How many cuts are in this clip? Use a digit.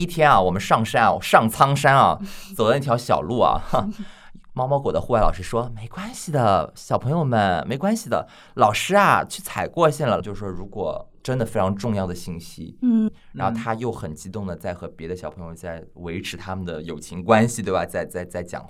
2